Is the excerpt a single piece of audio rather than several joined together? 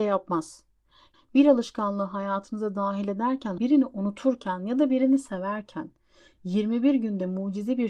no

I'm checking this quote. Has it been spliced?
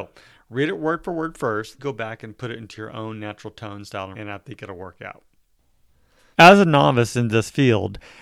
yes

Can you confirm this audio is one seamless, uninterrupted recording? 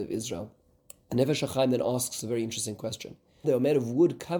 no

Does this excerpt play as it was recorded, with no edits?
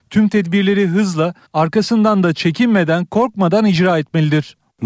no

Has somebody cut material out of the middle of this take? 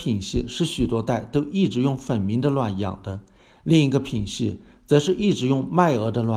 no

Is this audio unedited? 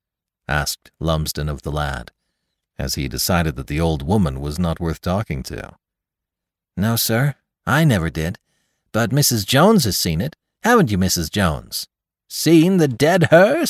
yes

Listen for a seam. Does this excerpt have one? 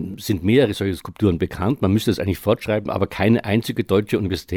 no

